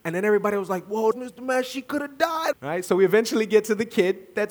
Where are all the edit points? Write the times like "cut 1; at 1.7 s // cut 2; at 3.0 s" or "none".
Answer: cut 1; at 1.1 s // cut 2; at 2.5 s

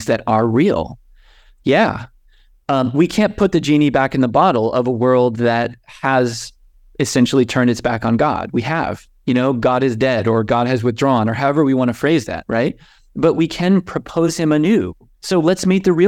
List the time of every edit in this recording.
cut 1; at 15.1 s

